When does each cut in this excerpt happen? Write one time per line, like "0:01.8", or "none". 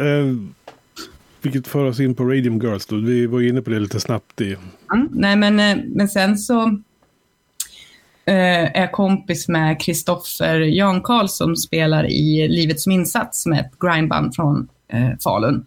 0:05.1